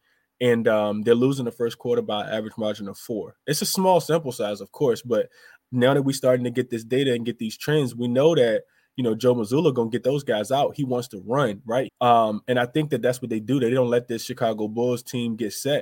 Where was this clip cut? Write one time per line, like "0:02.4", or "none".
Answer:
0:11.9